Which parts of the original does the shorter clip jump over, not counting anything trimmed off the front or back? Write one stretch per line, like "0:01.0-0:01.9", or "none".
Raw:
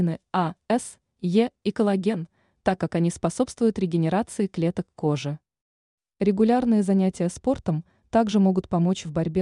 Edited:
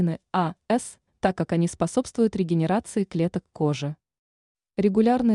0:01.1-0:02.5